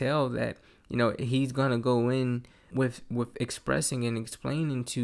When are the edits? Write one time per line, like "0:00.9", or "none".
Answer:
0:02.7